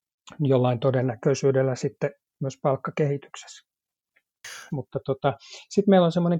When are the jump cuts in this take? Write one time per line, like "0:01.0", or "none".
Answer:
0:04.7